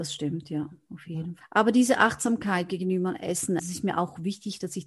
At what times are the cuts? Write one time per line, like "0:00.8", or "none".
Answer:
0:01.4
0:03.6